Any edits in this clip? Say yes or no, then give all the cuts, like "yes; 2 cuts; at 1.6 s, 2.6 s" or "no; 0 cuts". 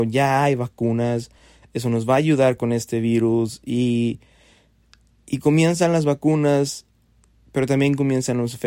no; 0 cuts